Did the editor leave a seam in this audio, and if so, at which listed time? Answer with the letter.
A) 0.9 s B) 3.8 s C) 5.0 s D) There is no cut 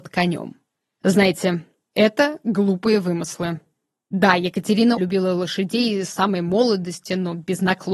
C